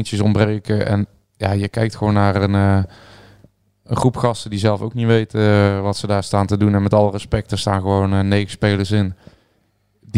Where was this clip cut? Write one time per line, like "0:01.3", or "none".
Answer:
none